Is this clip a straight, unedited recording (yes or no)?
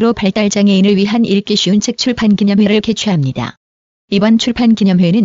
yes